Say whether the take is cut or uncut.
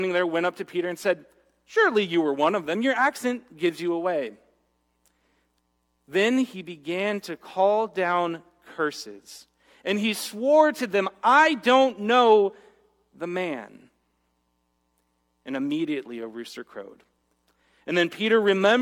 uncut